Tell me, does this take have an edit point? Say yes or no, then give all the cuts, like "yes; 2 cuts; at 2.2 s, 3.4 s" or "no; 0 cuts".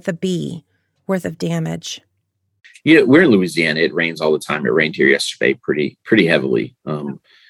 no; 0 cuts